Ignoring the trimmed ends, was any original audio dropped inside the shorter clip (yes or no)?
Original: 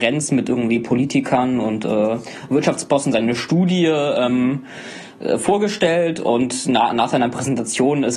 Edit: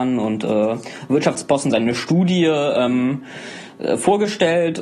no